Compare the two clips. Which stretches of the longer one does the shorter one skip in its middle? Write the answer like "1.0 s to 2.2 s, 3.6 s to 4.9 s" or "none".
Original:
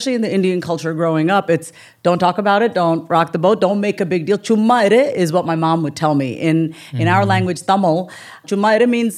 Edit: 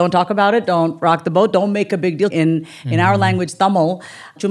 4.4 s to 6.4 s